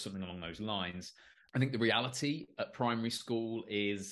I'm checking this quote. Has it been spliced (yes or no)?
no